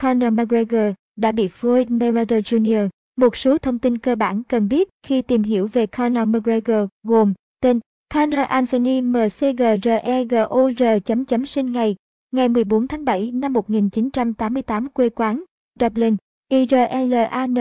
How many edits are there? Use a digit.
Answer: 1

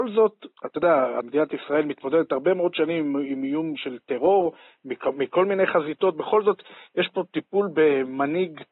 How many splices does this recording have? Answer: 0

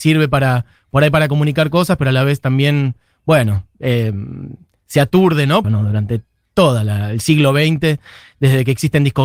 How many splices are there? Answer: 1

